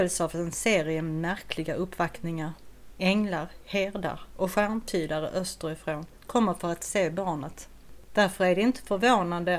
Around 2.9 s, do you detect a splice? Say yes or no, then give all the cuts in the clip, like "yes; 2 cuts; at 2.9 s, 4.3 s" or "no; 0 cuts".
no; 2 cuts; at 6.1 s, 8.0 s